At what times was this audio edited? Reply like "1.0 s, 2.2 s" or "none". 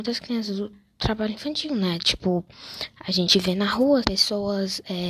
4.0 s

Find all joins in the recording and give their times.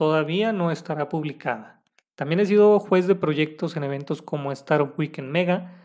2.0 s

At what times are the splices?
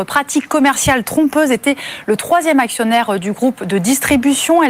none

